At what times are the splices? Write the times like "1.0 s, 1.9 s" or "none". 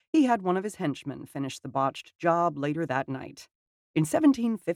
3.8 s